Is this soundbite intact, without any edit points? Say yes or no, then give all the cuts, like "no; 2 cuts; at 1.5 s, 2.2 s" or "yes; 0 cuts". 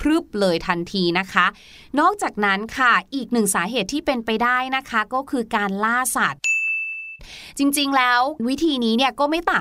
yes; 0 cuts